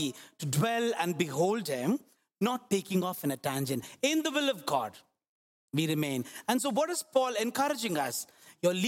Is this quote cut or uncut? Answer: uncut